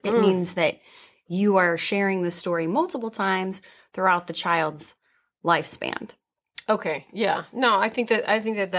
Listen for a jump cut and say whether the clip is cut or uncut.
uncut